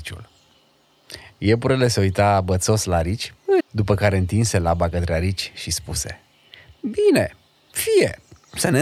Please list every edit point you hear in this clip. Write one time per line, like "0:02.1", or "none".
0:03.6